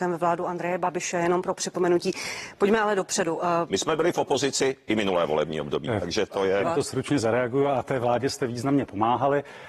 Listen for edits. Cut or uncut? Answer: cut